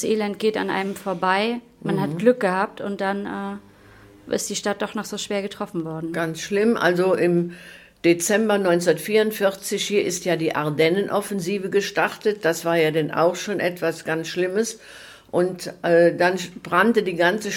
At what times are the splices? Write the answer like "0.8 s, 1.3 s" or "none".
none